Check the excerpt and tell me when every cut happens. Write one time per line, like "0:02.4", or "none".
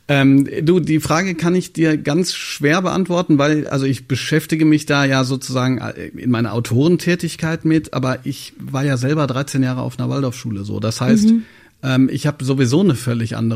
none